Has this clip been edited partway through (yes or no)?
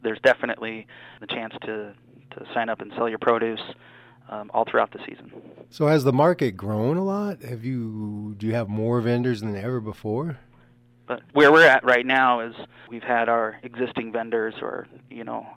yes